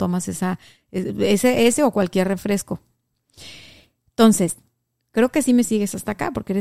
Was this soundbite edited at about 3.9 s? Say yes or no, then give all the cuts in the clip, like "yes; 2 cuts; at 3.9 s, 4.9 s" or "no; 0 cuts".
no; 0 cuts